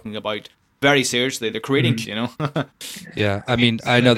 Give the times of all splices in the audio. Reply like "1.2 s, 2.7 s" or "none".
2.0 s